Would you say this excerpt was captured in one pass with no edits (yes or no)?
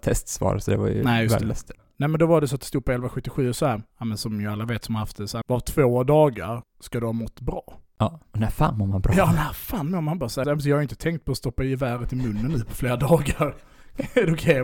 no